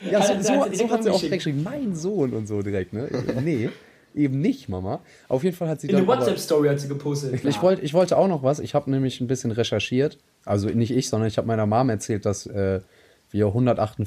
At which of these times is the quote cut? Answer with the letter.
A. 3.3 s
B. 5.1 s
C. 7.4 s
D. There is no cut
C